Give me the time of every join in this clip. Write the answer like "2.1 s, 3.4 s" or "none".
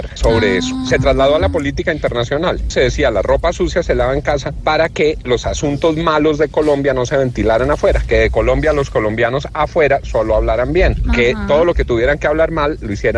2.7 s